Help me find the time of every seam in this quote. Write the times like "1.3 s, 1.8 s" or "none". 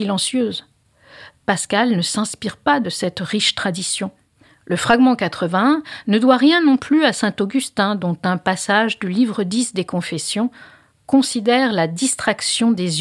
none

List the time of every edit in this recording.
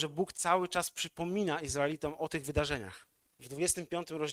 3.3 s

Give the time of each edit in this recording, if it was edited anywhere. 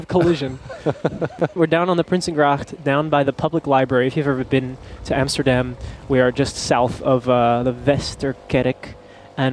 1.6 s

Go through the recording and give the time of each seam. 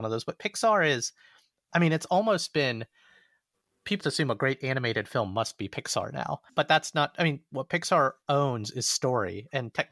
4.0 s

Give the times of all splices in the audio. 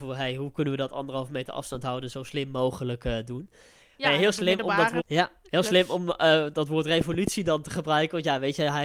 5.0 s

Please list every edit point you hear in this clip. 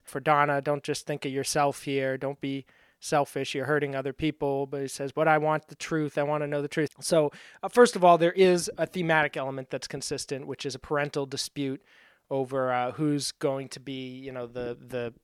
6.9 s

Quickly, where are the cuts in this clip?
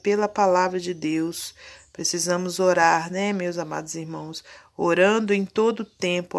none

